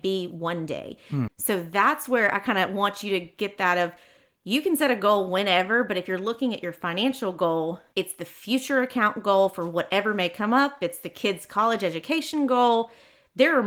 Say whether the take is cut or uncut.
cut